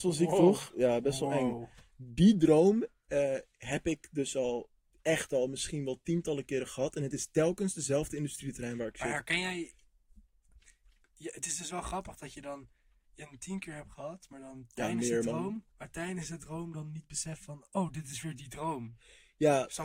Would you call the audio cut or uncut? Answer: cut